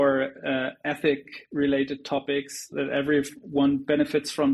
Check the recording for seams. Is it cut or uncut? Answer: cut